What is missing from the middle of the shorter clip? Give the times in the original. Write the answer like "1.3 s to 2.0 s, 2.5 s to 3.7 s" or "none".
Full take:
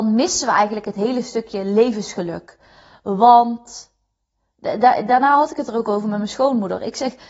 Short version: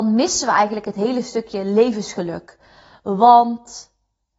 none